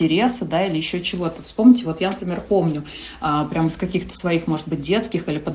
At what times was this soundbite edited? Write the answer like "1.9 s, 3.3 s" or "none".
none